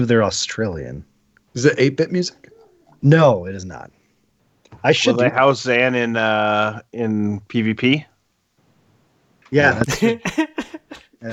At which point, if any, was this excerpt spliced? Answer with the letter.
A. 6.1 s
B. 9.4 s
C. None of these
B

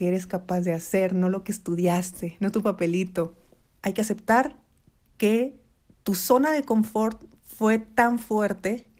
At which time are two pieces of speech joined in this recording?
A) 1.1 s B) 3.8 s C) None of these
B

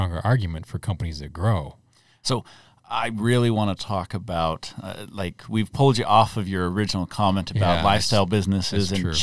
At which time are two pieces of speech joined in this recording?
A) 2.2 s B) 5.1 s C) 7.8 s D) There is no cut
D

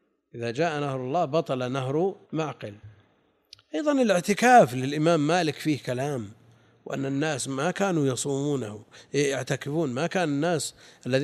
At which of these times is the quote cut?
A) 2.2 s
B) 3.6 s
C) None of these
A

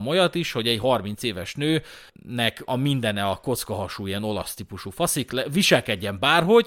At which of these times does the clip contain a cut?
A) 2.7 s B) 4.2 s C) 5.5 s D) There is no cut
A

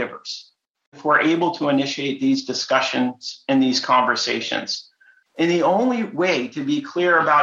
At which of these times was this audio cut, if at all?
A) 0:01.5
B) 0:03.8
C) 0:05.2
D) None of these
C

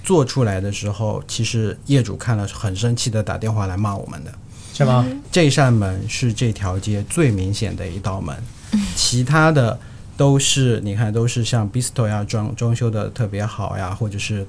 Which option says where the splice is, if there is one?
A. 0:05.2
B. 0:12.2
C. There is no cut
A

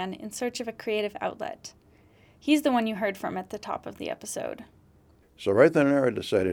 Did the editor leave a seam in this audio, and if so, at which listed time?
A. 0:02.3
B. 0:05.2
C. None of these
B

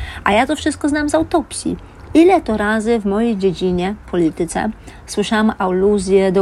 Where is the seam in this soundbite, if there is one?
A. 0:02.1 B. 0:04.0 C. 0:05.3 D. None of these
D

